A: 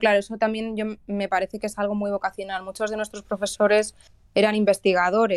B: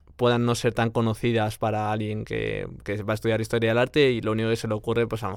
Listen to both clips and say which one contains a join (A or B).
B